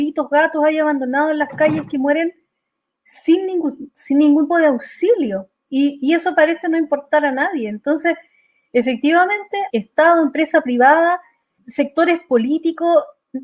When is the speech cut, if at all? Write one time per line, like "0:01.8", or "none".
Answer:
0:04.5
0:09.7
0:11.6